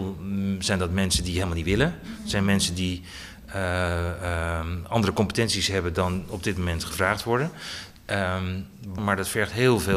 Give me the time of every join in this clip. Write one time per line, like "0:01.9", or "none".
0:09.0